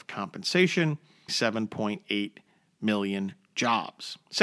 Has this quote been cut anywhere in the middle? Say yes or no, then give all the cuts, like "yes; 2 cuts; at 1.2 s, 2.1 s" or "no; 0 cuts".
yes; 1 cut; at 1.3 s